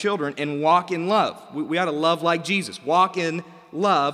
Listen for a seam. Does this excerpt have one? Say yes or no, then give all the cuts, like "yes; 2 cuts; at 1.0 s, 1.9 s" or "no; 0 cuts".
no; 0 cuts